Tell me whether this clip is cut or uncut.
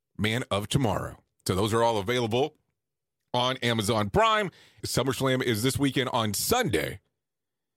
cut